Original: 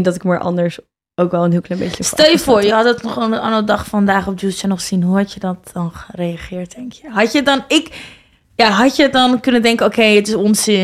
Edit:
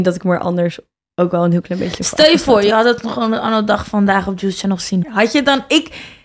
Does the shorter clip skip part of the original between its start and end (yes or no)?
yes